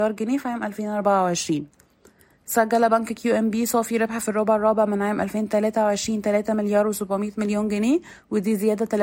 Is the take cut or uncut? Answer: uncut